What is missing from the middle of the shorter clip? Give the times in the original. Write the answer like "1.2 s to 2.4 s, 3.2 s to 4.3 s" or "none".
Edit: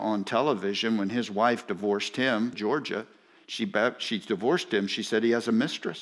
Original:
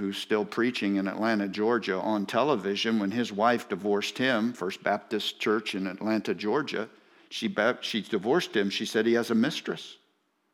4.5 s to 6.4 s